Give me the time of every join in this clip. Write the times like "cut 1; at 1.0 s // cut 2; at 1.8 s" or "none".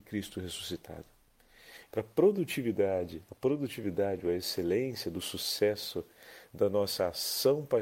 cut 1; at 1.9 s